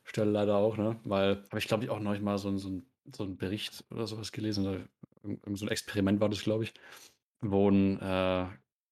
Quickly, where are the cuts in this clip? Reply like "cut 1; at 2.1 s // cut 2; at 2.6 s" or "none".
cut 1; at 1.5 s